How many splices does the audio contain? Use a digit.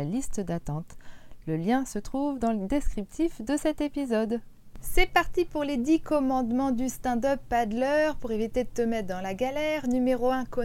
0